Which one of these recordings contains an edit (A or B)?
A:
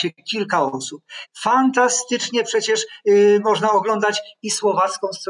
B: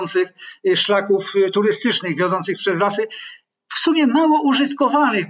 A